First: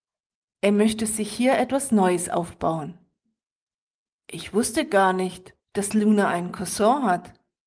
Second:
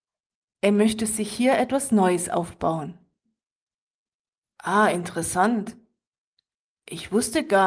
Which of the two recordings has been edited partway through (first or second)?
first